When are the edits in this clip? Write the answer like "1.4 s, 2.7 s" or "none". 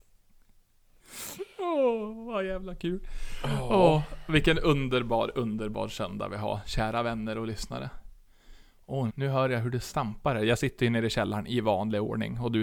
9.1 s